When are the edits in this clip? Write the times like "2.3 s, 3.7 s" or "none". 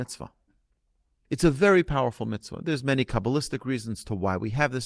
none